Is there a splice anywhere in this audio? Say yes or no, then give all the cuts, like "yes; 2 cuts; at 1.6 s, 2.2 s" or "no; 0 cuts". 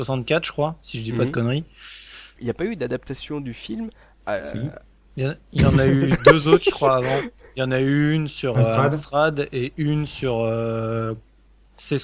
yes; 1 cut; at 2.4 s